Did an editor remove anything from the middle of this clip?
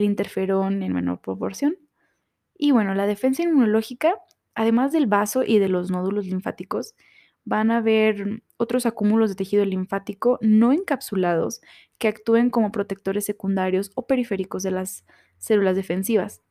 no; 0 cuts

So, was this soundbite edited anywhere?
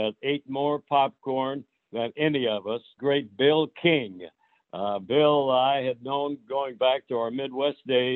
yes; 1 cut; at 3.0 s

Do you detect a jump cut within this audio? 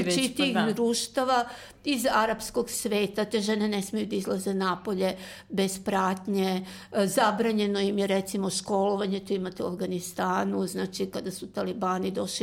no; 0 cuts

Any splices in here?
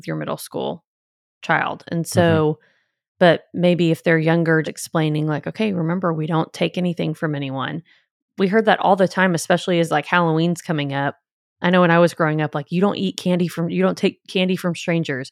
yes; 1 cut; at 4.6 s

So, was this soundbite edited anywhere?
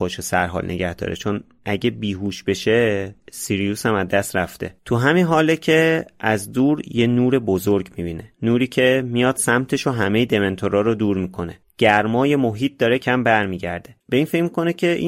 yes; 1 cut; at 13.0 s

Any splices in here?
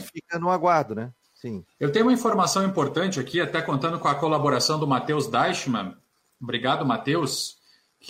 no; 0 cuts

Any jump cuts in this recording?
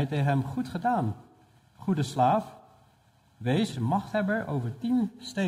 yes; 1 cut; at 3.7 s

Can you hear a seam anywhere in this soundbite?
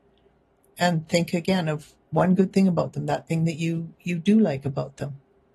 no; 0 cuts

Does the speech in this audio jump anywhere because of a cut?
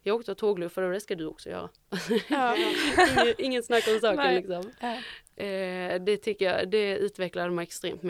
no; 0 cuts

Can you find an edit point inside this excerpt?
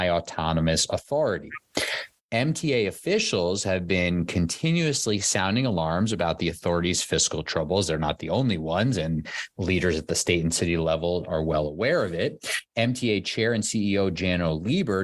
yes; 1 cut; at 2.2 s

